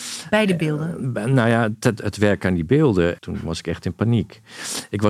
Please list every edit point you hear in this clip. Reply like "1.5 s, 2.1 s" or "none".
2.0 s, 3.2 s